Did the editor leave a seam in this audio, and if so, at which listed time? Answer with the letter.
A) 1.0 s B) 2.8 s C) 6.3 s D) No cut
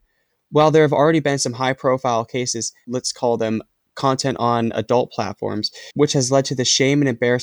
B